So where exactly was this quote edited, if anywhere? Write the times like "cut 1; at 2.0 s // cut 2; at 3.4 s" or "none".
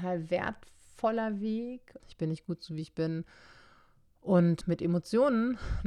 cut 1; at 2.0 s // cut 2; at 4.6 s